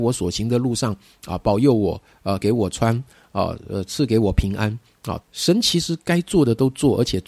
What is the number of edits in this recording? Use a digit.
2